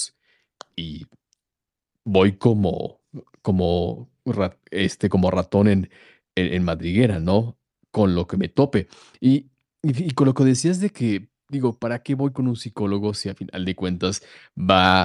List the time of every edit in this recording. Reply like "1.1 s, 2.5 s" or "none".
none

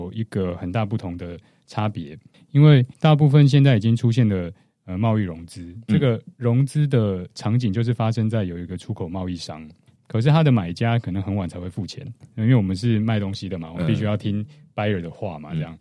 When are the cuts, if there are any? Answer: 10.0 s

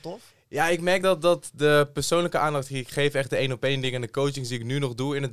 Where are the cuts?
none

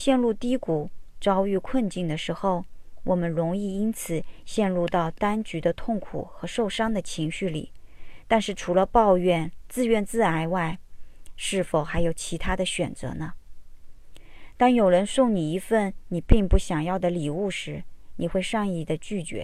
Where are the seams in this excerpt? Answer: 9.7 s

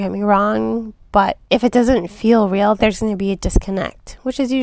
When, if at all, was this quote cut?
1.4 s, 2.8 s

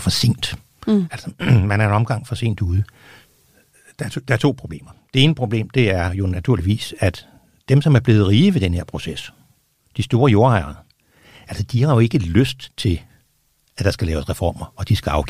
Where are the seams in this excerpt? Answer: none

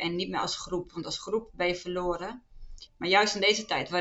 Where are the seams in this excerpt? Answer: 2.9 s

